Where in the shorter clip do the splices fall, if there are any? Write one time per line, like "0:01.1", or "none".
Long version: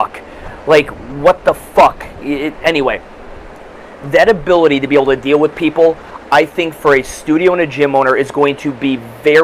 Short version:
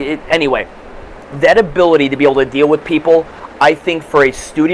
0:01.2